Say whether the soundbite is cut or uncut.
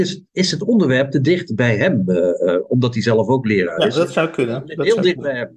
uncut